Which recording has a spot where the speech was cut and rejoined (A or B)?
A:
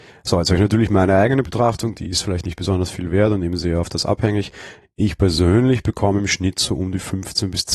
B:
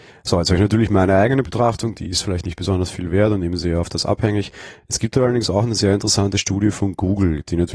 A